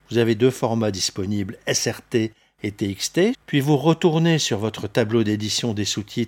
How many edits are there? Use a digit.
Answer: 1